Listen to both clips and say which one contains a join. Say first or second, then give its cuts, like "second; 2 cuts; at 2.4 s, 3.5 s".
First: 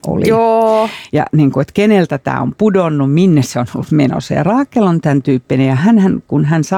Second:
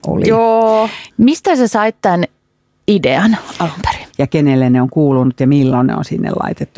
second; 2 cuts; at 1.1 s, 4.1 s